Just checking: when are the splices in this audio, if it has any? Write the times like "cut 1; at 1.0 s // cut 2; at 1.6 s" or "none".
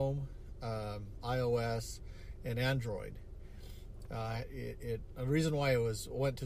cut 1; at 4.1 s